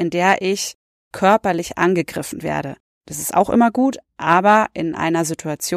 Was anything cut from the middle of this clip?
yes; 1 cut; at 3.0 s

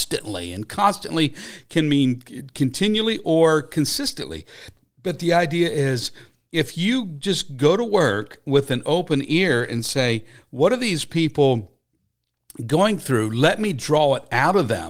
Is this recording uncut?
yes; 0 cuts

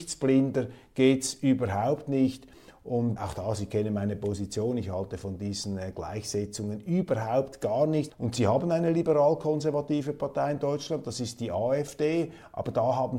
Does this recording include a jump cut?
yes; 2 cuts; at 3.2 s, 8.1 s

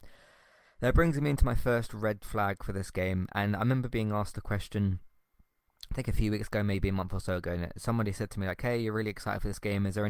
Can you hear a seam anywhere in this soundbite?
no; 0 cuts

